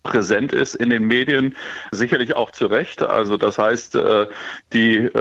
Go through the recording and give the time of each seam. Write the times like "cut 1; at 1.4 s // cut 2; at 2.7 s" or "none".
cut 1; at 3.0 s